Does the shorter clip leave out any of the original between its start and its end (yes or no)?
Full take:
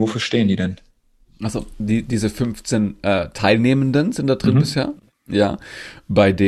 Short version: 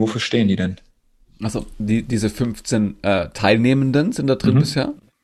no